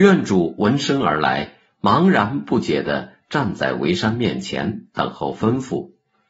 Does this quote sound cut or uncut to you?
uncut